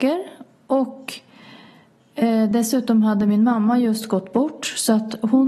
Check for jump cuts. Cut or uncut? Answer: uncut